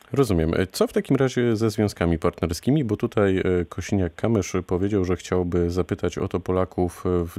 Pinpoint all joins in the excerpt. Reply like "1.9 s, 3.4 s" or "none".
none